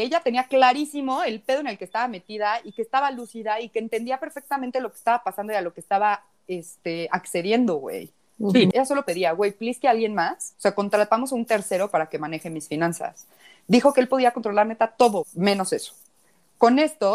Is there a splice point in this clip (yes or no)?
yes